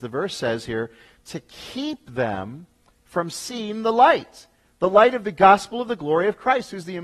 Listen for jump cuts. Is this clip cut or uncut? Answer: uncut